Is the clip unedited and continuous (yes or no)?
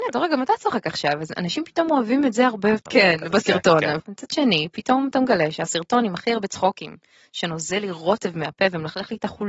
no